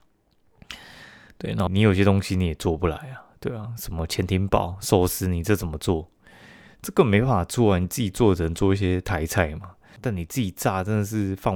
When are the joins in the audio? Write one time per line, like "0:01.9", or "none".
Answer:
0:01.7
0:10.0